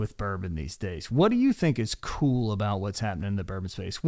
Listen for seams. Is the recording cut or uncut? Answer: uncut